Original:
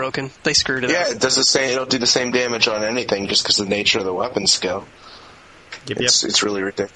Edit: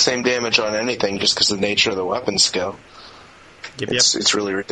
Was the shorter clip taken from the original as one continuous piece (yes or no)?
yes